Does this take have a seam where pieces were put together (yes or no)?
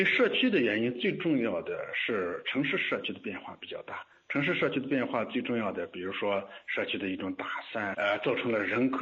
yes